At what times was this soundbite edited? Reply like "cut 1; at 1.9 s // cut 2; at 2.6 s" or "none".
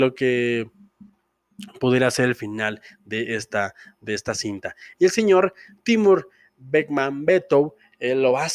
cut 1; at 4.9 s

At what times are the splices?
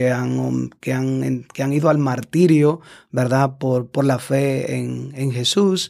none

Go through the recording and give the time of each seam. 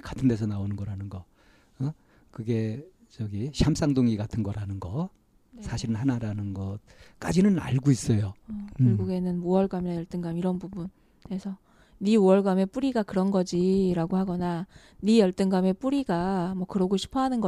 cut 1; at 8.4 s

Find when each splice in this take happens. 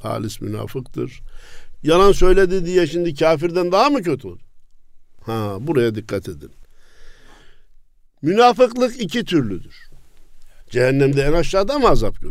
cut 1; at 1.8 s // cut 2; at 10.6 s

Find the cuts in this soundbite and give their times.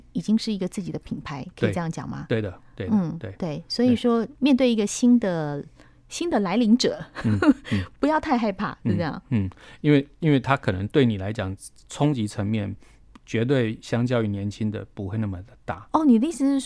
none

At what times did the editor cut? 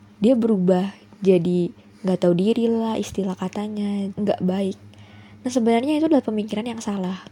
cut 1; at 4.1 s

